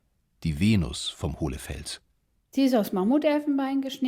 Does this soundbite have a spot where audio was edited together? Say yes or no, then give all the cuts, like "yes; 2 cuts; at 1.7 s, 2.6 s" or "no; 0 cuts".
no; 0 cuts